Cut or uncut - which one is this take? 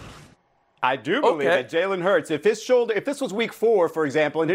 uncut